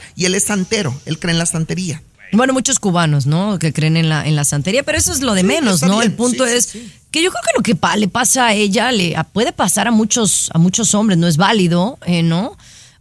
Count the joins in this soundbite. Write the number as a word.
zero